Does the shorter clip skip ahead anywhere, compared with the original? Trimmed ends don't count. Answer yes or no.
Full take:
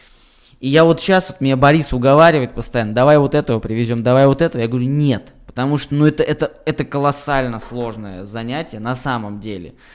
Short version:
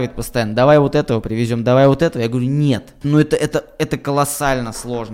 yes